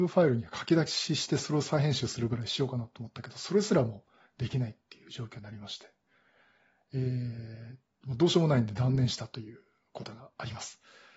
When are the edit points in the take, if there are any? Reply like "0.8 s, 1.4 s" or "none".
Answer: none